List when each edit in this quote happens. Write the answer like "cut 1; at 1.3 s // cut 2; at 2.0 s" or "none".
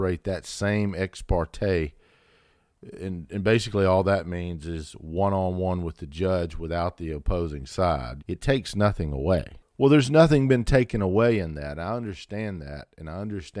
cut 1; at 8.2 s // cut 2; at 9.6 s